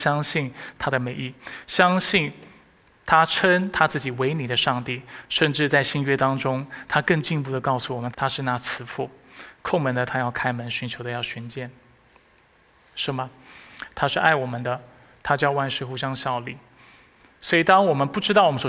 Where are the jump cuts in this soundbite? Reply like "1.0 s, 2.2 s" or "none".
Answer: 8.1 s